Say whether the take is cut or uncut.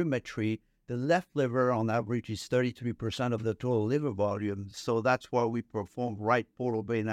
uncut